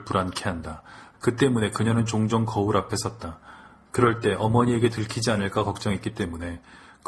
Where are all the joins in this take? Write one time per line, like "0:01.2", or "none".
0:01.1